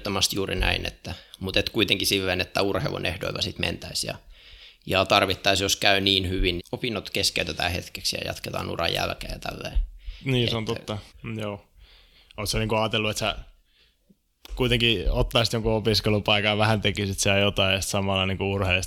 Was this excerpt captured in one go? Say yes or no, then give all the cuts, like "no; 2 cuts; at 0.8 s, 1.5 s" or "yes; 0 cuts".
no; 2 cuts; at 6.6 s, 11.1 s